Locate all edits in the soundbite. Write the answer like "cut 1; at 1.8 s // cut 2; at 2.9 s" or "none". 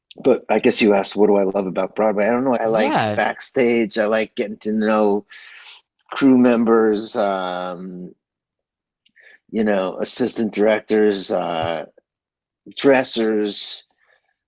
cut 1; at 2.6 s